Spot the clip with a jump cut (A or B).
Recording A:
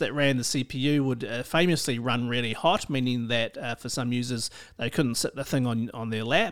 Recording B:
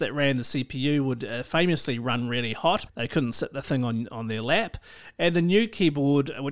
B